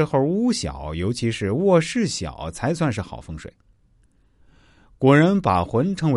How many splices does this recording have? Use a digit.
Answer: 1